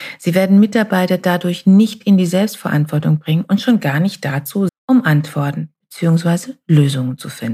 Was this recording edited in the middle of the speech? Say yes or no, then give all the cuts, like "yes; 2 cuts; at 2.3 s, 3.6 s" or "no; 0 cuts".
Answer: yes; 1 cut; at 4.7 s